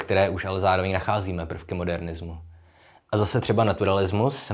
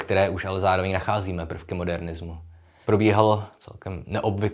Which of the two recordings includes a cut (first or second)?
second